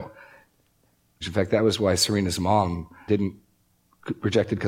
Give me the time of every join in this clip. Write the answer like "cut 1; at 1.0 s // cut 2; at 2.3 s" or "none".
cut 1; at 1.2 s // cut 2; at 3.1 s